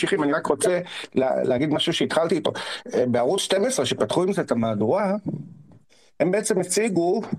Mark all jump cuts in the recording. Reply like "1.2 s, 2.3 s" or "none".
none